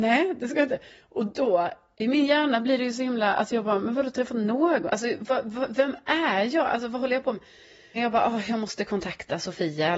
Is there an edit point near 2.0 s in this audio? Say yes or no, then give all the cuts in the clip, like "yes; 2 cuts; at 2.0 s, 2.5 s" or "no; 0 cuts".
no; 2 cuts; at 4.9 s, 8.0 s